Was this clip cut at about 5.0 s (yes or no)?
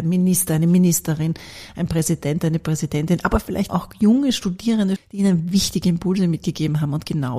yes